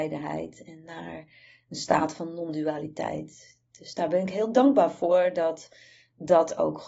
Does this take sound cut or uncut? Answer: uncut